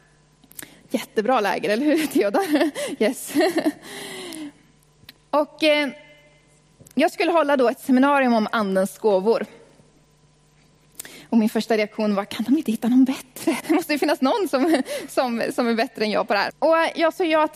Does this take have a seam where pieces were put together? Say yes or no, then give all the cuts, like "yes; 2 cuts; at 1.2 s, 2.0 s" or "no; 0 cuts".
yes; 2 cuts; at 13.6 s, 16.5 s